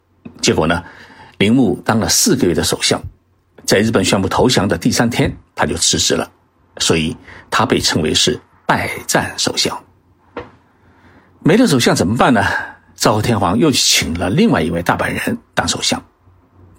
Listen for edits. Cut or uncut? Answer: uncut